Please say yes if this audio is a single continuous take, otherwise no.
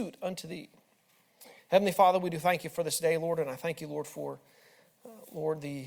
no